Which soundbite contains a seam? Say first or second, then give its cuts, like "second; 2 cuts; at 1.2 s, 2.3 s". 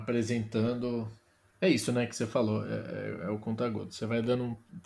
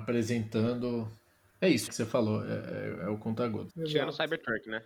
second; 2 cuts; at 1.9 s, 3.7 s